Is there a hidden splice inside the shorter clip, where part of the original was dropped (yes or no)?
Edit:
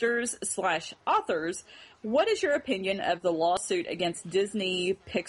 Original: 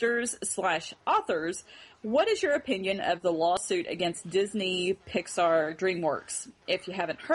no